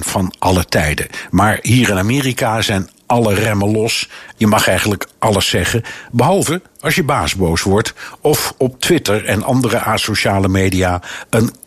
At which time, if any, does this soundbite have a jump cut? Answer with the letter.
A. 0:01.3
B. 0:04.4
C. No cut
B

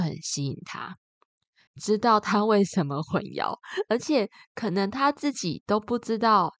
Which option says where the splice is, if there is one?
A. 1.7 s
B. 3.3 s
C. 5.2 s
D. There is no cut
A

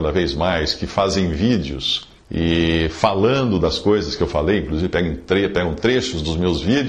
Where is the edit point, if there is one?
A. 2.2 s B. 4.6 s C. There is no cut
A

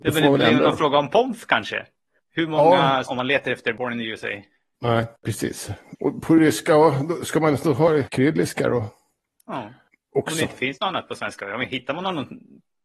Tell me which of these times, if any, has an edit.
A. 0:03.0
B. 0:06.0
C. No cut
A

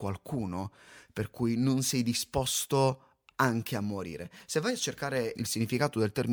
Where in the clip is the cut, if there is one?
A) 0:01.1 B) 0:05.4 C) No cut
B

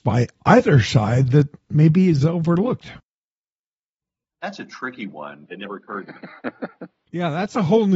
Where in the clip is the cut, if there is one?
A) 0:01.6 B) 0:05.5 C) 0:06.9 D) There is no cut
B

